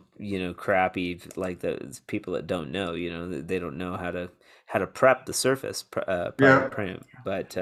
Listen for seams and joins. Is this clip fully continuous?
yes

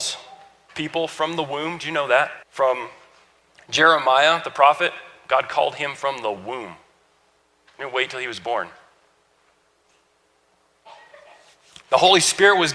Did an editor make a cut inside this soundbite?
yes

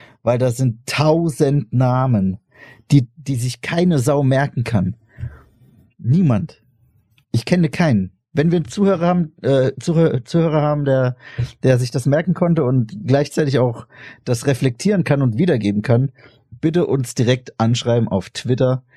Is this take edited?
no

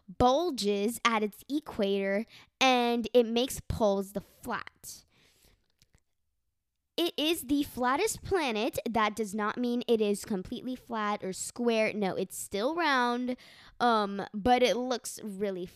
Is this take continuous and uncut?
yes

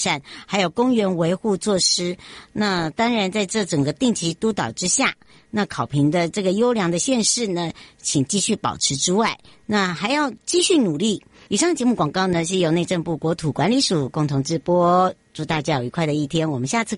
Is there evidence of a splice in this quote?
yes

